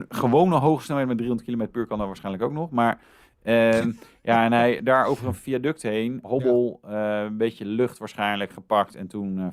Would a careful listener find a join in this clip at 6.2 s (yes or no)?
yes